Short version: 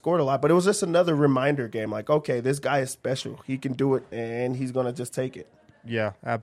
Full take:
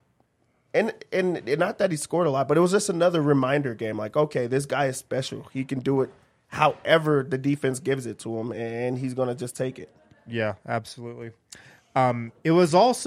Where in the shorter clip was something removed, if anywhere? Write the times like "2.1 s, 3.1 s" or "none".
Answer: 4.1 s